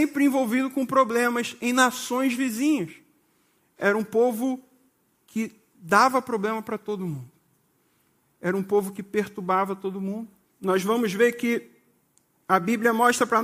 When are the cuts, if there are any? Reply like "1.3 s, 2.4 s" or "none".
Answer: 10.5 s